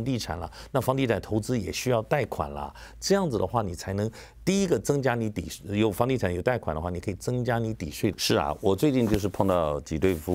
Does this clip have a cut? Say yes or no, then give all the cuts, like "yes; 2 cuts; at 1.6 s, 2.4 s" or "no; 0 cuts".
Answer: yes; 1 cut; at 8.1 s